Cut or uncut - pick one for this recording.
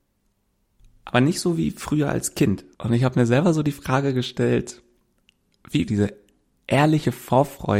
cut